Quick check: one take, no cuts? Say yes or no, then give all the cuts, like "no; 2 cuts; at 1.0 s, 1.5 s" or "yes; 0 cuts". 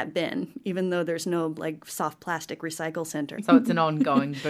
no; 1 cut; at 3.4 s